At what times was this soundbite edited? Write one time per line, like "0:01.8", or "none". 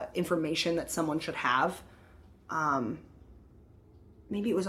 none